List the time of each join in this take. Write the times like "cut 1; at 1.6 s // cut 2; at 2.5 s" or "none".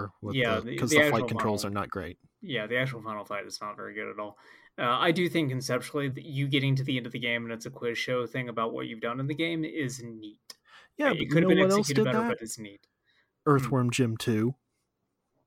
cut 1; at 6.1 s

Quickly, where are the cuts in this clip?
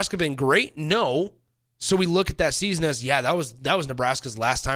none

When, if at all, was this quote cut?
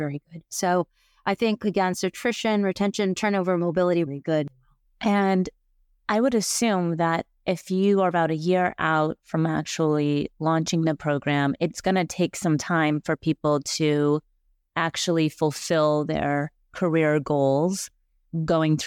cut 1; at 4.1 s

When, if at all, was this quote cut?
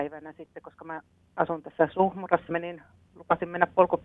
cut 1; at 2.5 s

